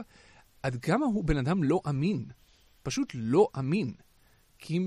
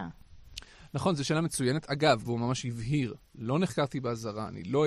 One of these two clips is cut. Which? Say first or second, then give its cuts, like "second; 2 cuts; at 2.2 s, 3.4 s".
second; 1 cut; at 2.2 s